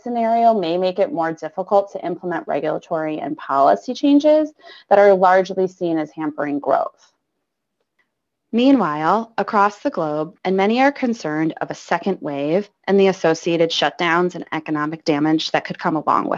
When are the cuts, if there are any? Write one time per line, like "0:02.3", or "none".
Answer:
0:10.4